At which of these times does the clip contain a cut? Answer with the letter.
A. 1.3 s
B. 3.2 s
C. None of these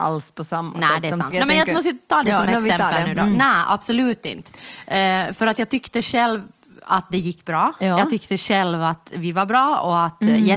A